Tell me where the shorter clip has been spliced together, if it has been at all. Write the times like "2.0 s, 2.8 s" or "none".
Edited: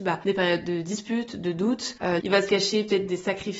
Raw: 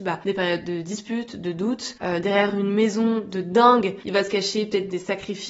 2.2 s